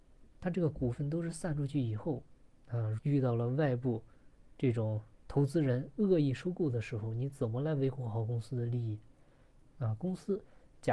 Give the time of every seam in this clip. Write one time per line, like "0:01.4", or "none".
0:03.0